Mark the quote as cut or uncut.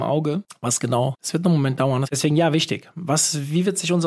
cut